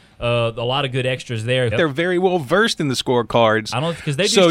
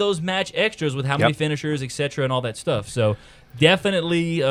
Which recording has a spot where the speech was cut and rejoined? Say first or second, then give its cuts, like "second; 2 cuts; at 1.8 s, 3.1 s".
first; 1 cut; at 1.7 s